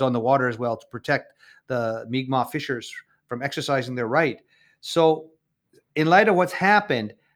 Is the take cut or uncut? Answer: uncut